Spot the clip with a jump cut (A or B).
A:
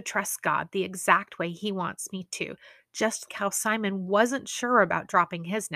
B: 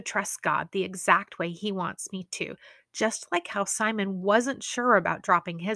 A